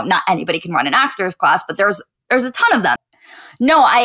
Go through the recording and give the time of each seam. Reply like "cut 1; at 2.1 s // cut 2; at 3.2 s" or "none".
cut 1; at 3.0 s